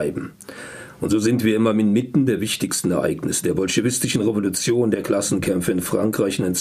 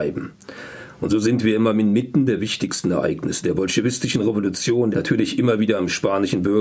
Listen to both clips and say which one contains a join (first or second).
second